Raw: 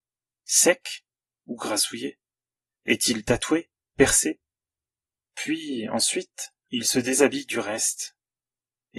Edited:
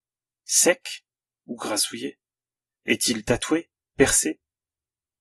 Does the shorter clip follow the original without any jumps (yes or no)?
yes